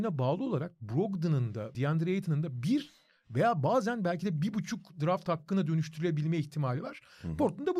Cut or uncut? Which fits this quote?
cut